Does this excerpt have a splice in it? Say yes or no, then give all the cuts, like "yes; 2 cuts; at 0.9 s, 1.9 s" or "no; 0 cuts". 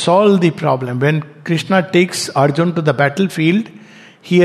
no; 0 cuts